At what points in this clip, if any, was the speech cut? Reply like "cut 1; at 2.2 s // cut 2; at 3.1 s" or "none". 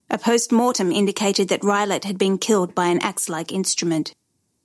none